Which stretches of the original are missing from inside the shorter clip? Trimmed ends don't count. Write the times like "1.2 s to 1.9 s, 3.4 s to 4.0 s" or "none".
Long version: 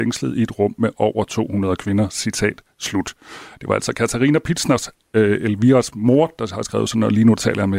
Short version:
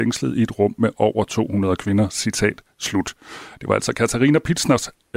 none